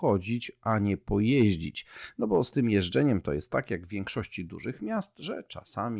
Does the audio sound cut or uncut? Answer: uncut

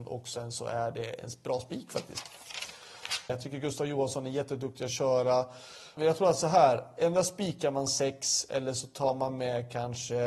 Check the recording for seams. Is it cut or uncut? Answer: cut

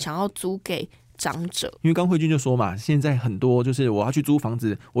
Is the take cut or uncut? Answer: cut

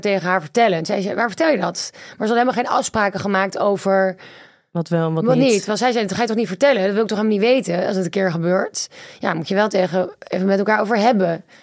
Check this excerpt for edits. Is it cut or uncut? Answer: uncut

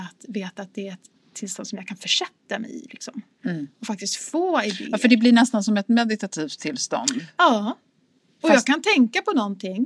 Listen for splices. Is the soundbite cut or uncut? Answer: uncut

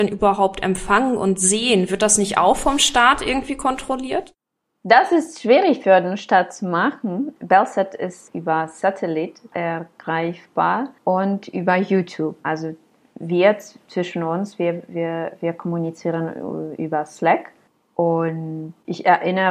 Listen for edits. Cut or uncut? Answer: cut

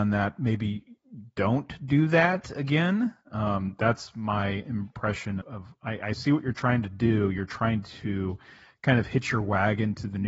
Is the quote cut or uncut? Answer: cut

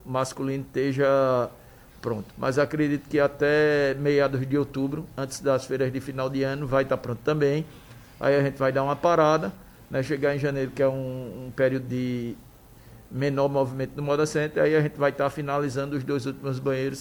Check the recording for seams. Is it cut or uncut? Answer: cut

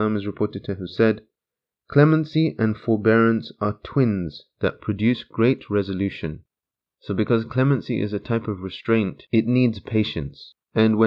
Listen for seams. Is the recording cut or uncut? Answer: uncut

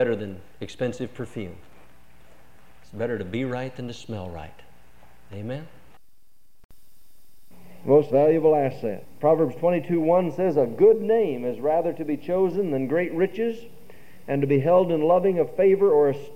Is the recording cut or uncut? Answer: uncut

